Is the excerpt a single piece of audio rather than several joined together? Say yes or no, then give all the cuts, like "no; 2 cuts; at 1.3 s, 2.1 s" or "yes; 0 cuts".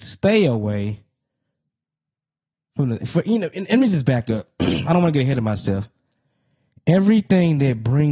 no; 1 cut; at 3.0 s